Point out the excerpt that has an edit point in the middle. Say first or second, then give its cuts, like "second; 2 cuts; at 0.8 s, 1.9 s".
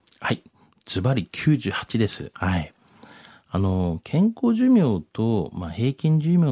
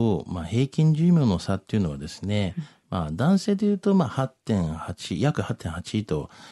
first; 1 cut; at 2.3 s